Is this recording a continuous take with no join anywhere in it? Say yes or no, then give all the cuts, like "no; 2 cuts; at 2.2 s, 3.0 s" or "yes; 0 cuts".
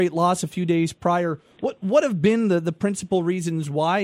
yes; 0 cuts